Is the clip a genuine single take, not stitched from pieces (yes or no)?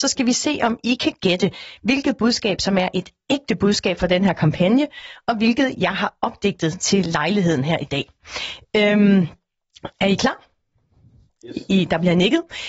yes